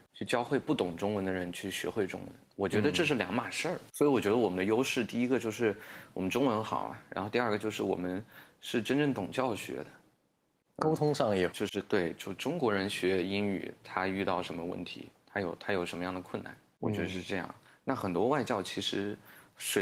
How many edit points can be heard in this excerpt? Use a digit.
1